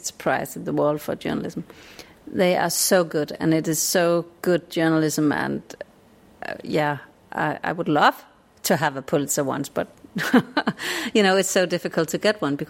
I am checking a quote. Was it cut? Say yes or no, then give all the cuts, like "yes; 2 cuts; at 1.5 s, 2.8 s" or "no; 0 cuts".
no; 0 cuts